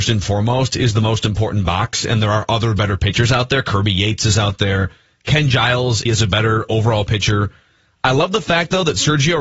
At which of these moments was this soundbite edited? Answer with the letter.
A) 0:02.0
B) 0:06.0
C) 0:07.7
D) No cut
B